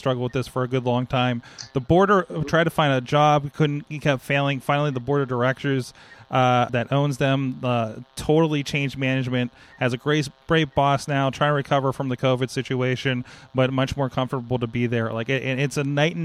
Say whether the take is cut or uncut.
cut